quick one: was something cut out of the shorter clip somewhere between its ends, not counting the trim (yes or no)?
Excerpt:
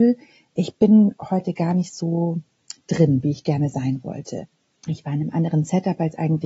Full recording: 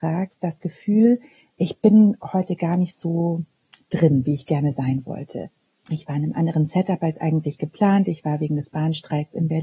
no